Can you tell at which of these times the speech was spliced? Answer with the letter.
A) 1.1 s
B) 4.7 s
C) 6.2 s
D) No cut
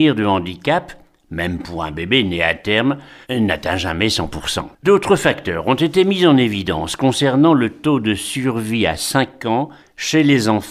B